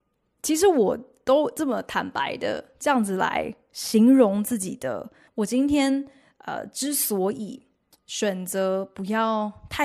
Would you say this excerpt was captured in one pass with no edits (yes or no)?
no